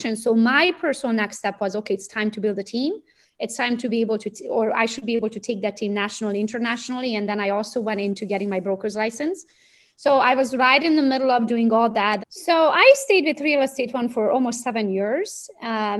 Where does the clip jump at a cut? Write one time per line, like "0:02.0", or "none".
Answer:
0:12.2

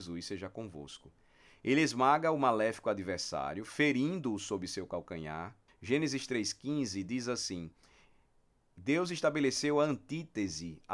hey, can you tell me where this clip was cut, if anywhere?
0:05.7

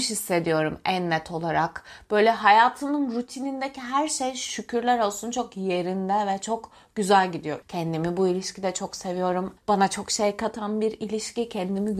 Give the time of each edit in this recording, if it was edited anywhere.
0:07.6
0:09.6

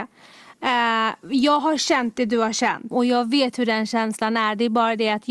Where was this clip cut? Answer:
0:02.9

